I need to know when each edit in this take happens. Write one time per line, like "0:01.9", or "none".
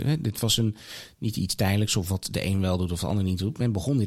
none